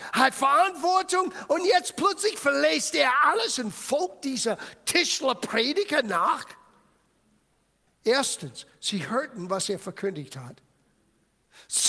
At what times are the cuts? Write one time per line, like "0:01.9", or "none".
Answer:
0:07.9